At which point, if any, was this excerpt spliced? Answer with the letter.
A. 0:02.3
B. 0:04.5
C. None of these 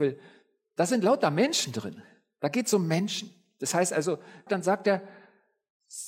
B